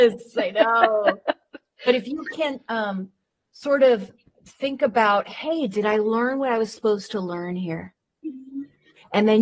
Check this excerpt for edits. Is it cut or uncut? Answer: uncut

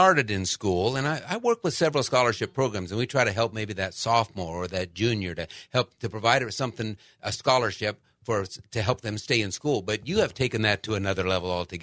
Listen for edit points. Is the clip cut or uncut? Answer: uncut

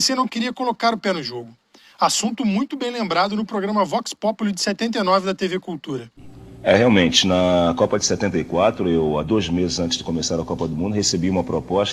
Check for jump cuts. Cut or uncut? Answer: uncut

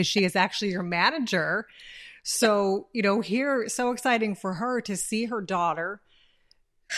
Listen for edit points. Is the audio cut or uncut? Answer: uncut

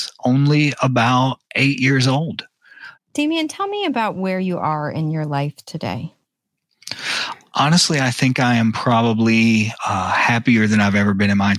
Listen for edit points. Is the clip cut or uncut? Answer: cut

